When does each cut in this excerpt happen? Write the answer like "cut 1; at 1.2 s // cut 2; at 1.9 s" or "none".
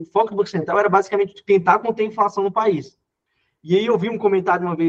none